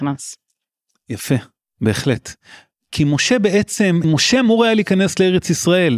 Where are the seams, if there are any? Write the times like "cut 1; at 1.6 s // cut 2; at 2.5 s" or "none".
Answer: cut 1; at 4.0 s